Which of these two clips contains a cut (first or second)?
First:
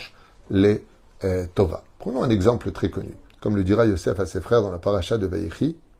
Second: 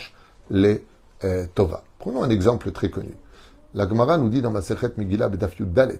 first